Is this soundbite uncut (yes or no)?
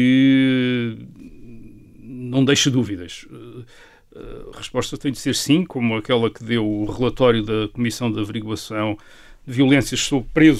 no